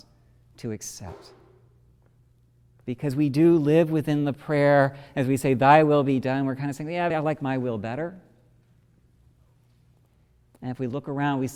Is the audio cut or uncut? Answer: cut